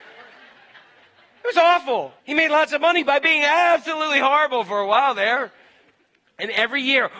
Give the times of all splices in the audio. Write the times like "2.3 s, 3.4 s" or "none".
2.2 s